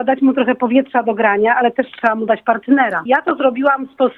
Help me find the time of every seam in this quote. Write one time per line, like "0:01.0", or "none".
0:03.1